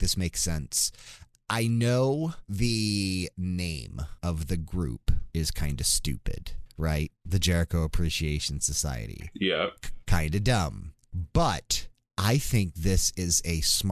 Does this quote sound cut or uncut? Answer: uncut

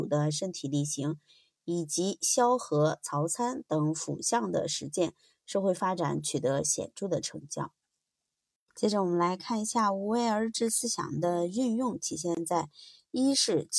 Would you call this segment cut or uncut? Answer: uncut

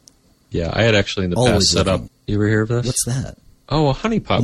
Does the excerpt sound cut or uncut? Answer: cut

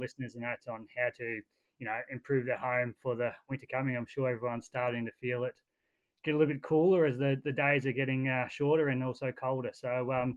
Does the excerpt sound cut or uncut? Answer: uncut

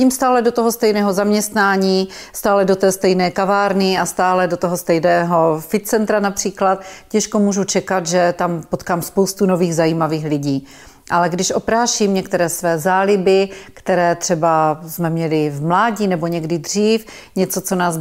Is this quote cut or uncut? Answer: uncut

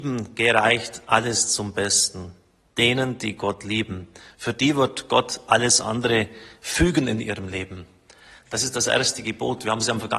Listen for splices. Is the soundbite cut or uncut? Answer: uncut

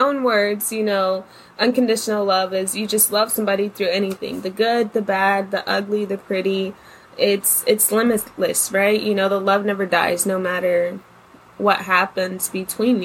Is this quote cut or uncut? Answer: uncut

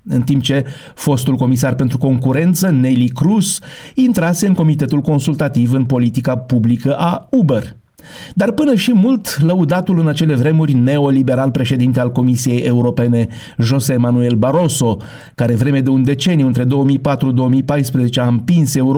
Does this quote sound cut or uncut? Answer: uncut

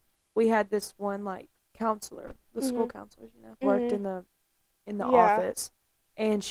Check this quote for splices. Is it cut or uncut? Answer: cut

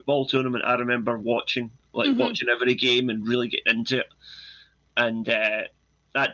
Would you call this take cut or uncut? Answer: uncut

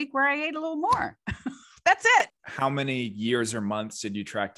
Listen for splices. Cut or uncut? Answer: cut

